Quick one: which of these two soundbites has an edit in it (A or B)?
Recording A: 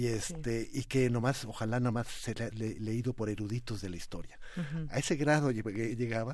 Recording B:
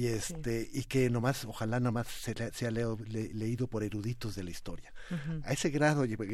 A